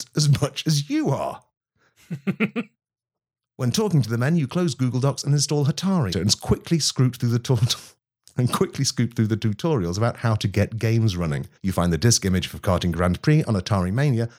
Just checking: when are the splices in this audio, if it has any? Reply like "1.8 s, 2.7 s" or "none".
6.1 s, 11.6 s